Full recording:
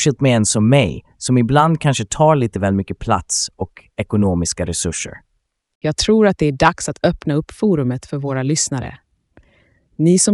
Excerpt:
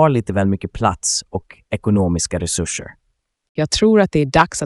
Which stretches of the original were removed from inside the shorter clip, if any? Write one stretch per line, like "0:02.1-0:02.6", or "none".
none

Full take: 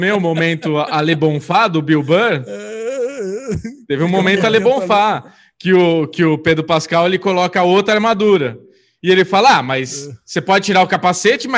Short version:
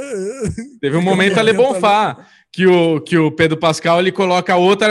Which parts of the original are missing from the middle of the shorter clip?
none

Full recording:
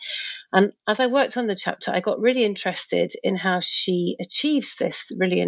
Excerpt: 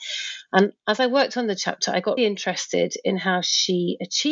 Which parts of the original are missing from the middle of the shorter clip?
0:02.2-0:02.4

